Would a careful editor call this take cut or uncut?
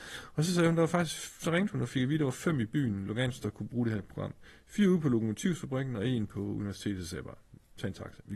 uncut